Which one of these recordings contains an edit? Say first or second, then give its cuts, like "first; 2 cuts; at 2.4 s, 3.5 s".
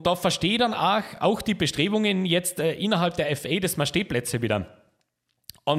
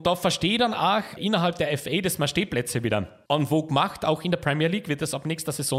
second; 2 cuts; at 1.2 s, 3.3 s